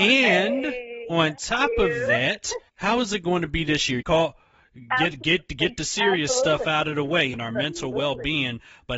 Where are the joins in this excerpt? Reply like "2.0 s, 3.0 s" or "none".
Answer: 2.7 s, 4.0 s, 7.3 s